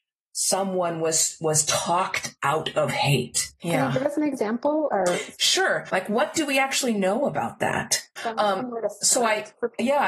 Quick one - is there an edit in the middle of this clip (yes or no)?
yes